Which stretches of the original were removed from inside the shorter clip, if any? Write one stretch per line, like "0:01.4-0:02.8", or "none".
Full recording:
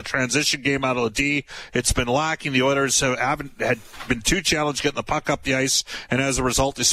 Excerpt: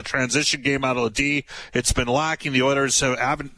none